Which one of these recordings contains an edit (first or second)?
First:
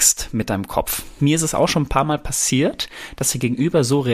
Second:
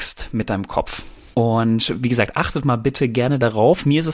first